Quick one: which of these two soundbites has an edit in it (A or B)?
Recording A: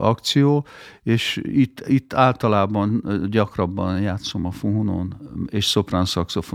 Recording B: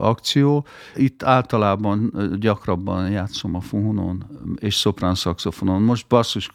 B